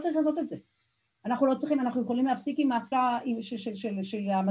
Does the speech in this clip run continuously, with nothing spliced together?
no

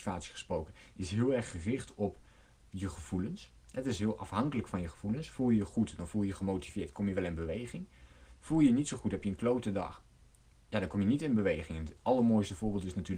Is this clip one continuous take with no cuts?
yes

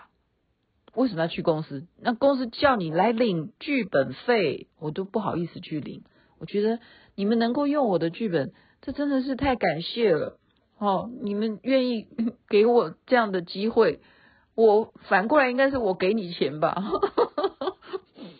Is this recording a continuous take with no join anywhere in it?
yes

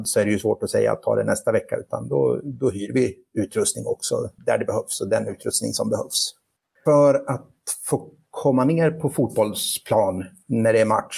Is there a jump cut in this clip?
yes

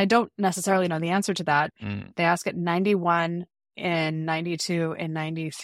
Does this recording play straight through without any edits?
no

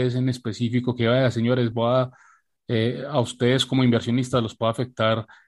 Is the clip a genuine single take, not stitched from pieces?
yes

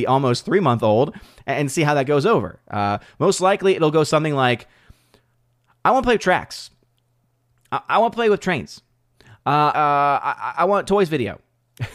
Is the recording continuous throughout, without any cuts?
no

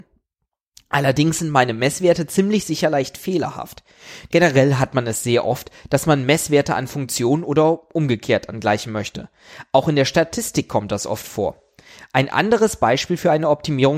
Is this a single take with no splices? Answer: no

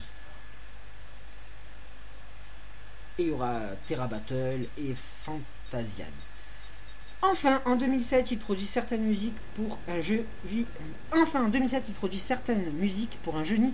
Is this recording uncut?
yes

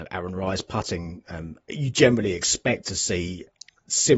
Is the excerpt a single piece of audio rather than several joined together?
no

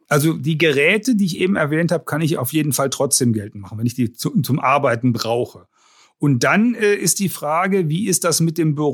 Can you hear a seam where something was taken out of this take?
no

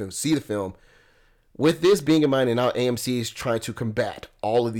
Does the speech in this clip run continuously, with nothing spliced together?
yes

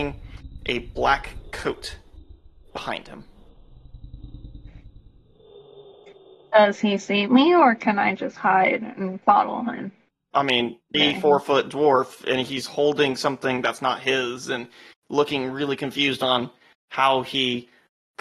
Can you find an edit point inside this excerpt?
yes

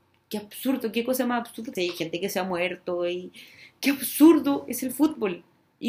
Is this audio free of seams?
no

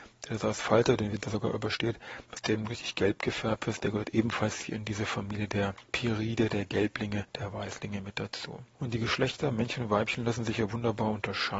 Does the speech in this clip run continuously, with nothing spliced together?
no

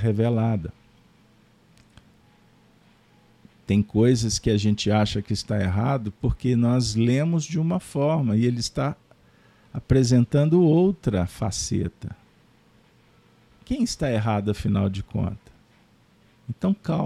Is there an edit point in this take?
no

